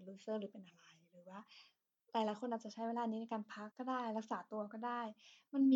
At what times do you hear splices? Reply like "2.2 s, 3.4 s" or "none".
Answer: 3.7 s